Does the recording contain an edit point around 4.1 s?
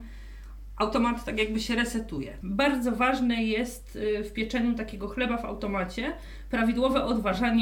no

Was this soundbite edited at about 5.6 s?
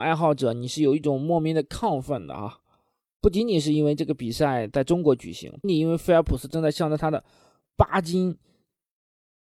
yes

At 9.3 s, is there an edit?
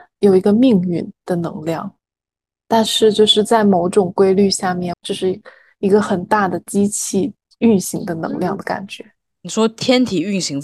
no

